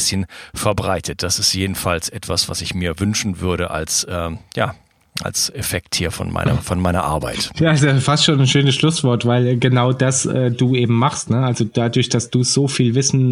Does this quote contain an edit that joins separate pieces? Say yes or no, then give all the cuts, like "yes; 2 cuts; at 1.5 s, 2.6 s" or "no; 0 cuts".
no; 0 cuts